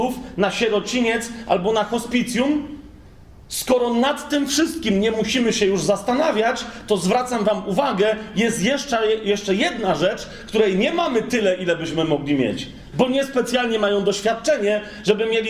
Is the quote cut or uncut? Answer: cut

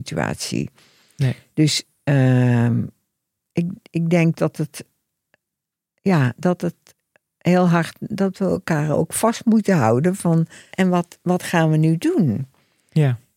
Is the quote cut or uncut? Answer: cut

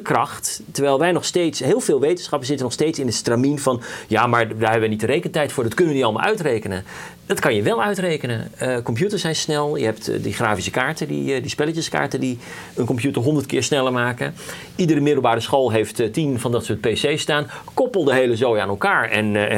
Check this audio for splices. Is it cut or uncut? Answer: uncut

